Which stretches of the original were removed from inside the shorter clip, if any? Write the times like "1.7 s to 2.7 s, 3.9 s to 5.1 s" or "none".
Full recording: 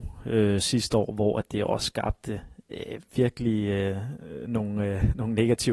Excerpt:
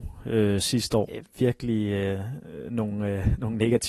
1.1 s to 2.8 s

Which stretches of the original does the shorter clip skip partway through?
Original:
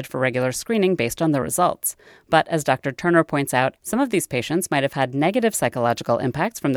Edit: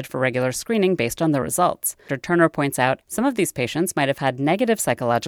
2.1 s to 2.8 s

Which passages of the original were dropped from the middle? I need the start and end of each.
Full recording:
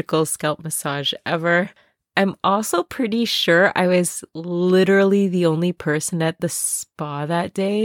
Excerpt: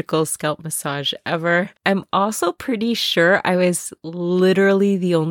1.8 s to 2.1 s

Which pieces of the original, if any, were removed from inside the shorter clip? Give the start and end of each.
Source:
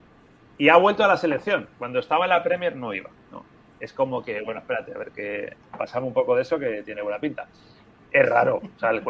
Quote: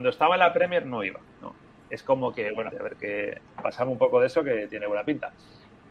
4.6 s to 4.9 s

